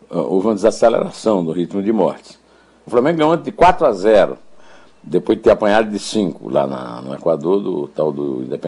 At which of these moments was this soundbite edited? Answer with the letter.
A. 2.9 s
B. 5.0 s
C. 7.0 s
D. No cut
A